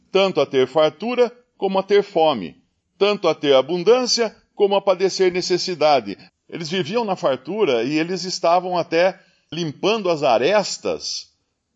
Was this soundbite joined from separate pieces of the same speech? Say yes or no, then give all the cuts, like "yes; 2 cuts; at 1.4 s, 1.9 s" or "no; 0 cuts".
yes; 2 cuts; at 6.3 s, 9.5 s